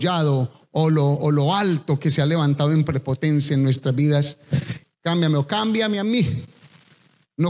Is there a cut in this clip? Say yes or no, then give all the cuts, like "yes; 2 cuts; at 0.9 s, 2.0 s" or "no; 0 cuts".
yes; 1 cut; at 4.8 s